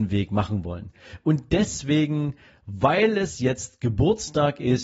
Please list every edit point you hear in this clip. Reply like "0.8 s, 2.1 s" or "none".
none